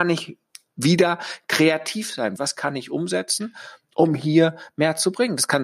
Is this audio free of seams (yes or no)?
no